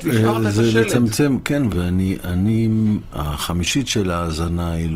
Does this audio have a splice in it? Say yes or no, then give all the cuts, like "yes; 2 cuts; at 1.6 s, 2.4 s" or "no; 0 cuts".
yes; 2 cuts; at 1.7 s, 3.1 s